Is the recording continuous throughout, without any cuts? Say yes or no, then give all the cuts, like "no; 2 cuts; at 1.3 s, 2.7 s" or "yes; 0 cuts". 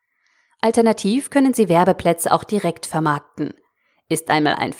yes; 0 cuts